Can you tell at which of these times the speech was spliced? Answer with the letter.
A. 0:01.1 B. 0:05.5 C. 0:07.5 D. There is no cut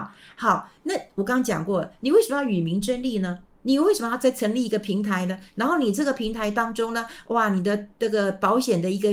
D